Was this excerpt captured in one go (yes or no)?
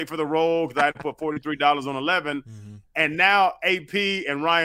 yes